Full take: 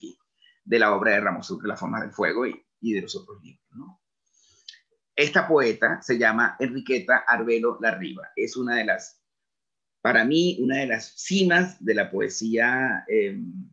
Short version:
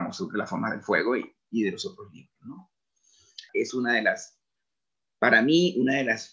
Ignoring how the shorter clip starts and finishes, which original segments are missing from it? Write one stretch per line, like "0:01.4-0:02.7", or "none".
0:04.8-0:08.3

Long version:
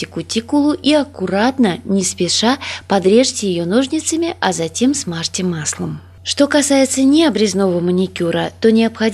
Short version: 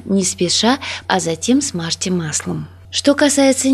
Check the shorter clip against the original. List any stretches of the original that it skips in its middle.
0:02.8-0:04.4

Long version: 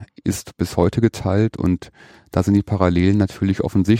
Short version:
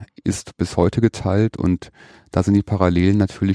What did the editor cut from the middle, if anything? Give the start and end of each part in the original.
none

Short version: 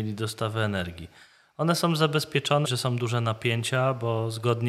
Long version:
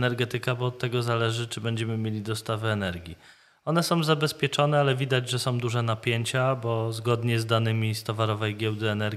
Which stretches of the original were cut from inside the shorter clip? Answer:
0:04.7-0:05.3

